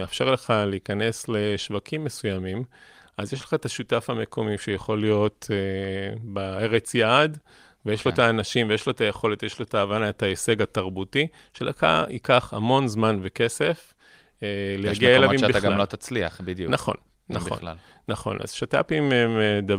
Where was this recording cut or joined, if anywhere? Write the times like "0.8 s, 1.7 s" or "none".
none

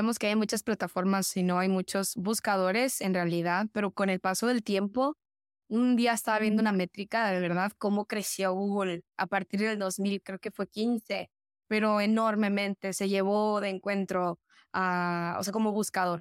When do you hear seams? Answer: none

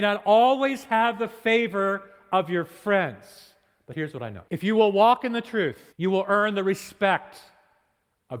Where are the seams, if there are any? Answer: 4.5 s, 5.9 s

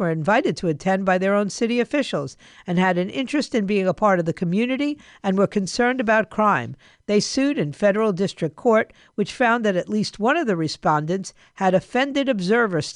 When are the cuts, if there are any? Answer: 6.9 s

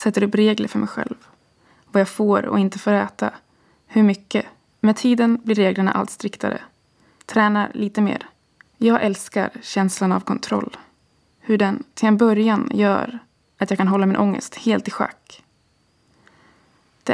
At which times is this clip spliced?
4.7 s, 7.2 s, 8.6 s

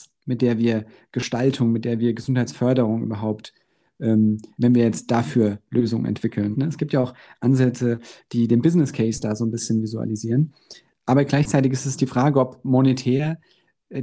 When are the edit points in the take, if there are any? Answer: 4.5 s, 6.5 s

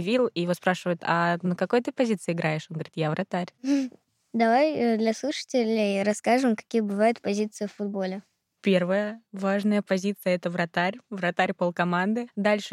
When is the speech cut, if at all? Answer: none

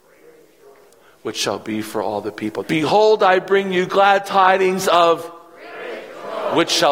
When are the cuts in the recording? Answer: 2.6 s

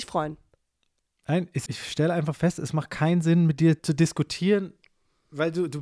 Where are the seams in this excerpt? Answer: 1.7 s

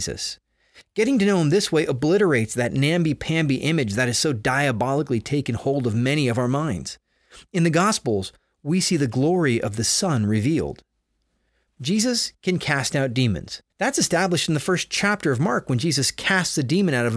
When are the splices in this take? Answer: 11.7 s, 13.7 s

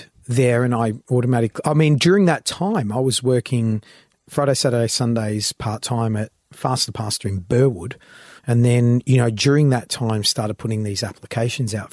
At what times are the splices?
8.4 s

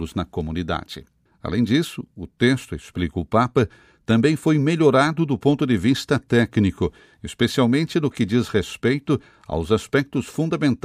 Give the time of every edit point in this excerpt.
1.3 s

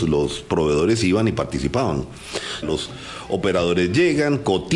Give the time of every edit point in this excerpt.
2.6 s

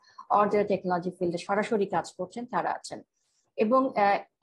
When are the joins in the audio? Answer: none

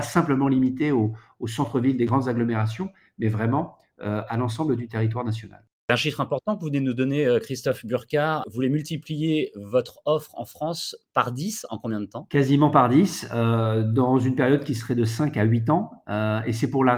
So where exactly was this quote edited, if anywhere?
none

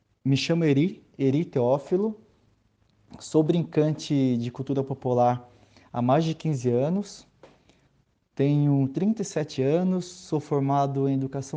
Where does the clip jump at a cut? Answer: none

